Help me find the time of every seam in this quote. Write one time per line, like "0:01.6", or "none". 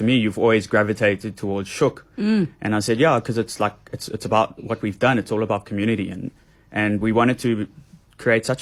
none